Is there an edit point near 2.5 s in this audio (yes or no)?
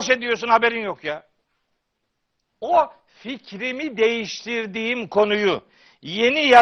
yes